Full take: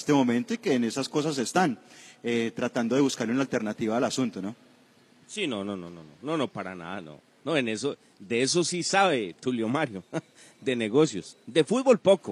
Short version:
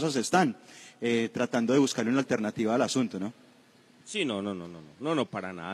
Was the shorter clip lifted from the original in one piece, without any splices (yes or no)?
yes